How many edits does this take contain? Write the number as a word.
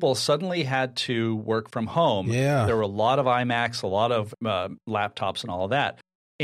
one